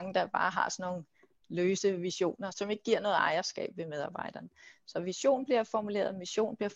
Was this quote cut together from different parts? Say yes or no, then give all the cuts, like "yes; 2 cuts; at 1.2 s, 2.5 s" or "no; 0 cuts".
yes; 1 cut; at 2.5 s